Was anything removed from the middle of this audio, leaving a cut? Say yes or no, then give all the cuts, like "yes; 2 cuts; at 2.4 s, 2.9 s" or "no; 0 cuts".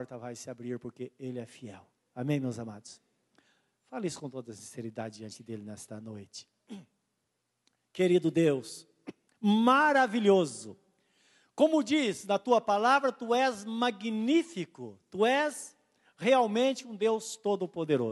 yes; 1 cut; at 9.3 s